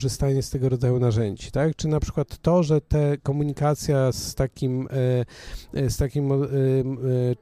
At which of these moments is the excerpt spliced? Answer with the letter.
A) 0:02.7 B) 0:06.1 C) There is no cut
C